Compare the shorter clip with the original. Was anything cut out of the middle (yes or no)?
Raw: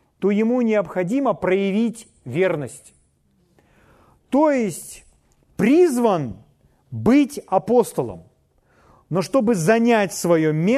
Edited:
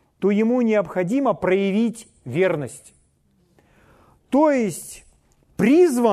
no